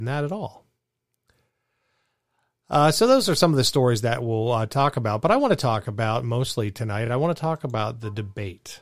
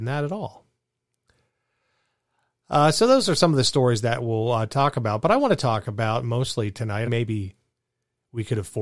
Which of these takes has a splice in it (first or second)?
second